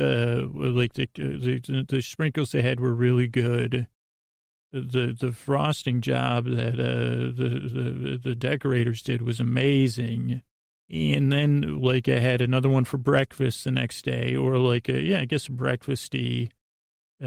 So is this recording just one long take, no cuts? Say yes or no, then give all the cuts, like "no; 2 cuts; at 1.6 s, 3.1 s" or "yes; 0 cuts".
yes; 0 cuts